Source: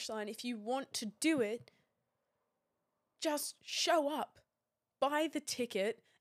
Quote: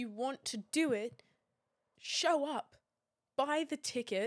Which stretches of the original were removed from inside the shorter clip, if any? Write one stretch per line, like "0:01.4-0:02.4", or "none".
0:02.4-0:03.6